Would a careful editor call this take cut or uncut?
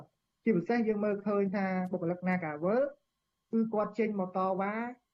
uncut